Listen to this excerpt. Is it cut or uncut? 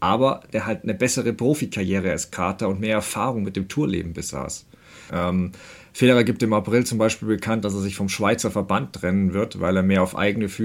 cut